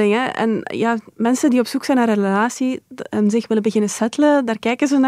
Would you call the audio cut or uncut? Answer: uncut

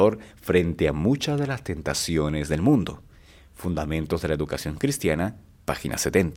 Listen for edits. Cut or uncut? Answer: uncut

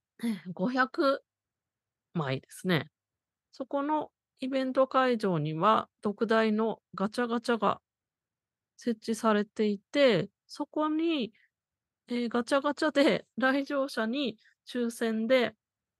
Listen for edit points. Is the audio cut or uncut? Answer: cut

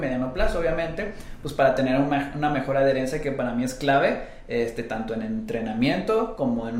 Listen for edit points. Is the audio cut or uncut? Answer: uncut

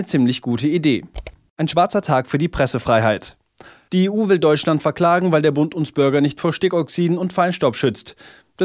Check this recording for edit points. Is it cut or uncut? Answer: cut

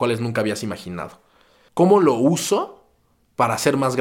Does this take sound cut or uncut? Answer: cut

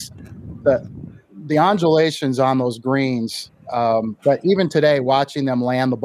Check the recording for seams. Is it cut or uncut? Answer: cut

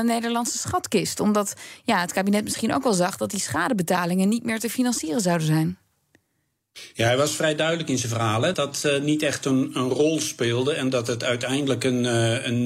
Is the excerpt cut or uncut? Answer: cut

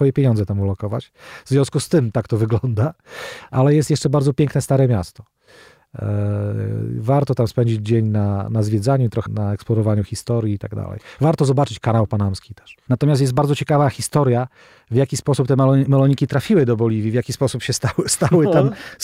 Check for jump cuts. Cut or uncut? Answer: cut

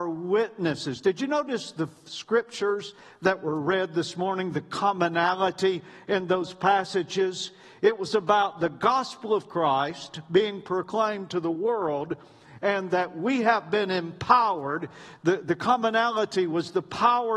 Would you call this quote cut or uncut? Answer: uncut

